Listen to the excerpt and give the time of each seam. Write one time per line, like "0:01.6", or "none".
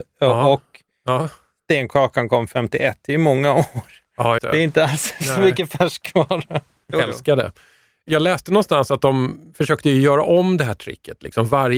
0:04.4
0:06.9

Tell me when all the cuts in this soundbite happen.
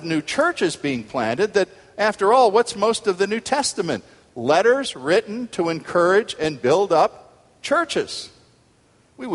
none

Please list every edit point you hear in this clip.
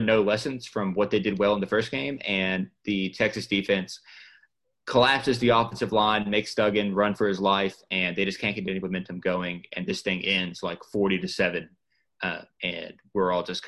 0:12.5

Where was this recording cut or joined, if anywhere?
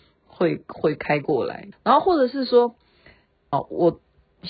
0:01.7
0:03.5

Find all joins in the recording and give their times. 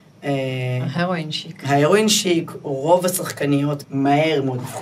0:03.8

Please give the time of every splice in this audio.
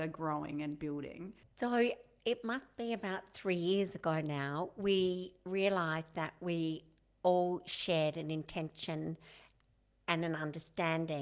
0:01.4

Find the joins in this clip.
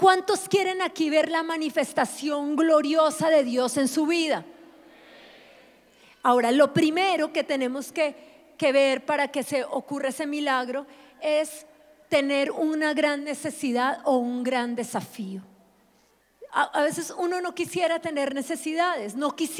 none

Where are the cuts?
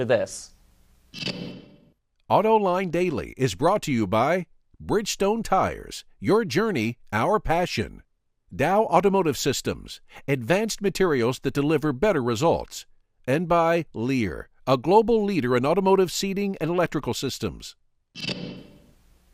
none

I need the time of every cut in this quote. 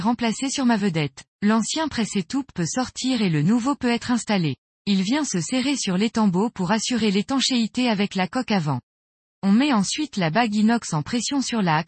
0:01.3

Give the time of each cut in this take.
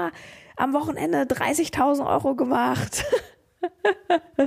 none

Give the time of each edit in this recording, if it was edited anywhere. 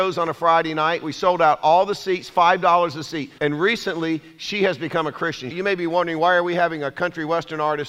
0:03.4
0:05.5

